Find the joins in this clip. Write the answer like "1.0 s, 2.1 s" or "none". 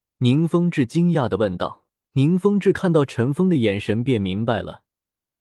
2.0 s